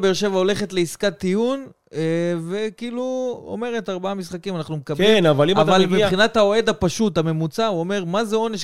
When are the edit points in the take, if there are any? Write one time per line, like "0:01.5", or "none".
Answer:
none